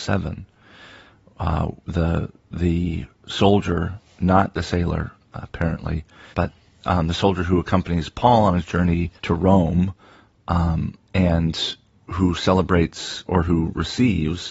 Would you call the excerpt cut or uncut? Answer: cut